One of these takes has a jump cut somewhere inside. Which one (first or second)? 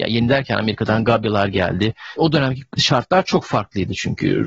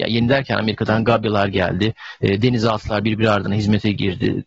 first